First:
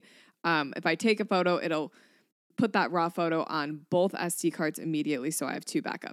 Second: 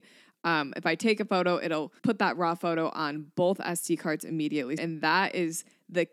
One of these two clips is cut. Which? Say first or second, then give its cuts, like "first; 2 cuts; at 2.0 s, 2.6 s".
second; 2 cuts; at 2.0 s, 4.8 s